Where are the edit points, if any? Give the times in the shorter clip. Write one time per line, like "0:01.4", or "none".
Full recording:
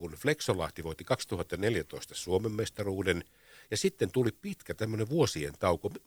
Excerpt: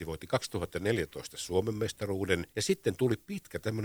0:02.5